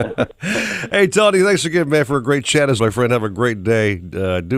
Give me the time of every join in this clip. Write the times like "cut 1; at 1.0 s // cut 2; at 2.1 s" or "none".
cut 1; at 2.8 s

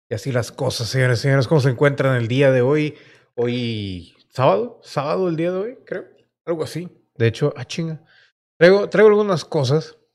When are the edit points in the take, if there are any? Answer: cut 1; at 7.2 s

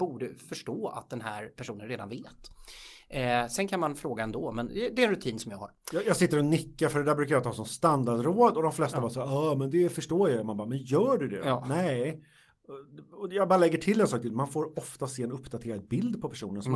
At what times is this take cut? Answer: cut 1; at 4.7 s

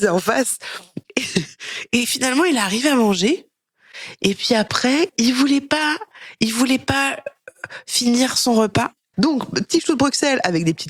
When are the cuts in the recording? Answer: cut 1; at 5.1 s // cut 2; at 9.1 s

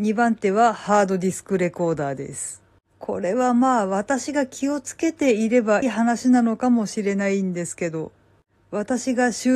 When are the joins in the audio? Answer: cut 1; at 5.8 s

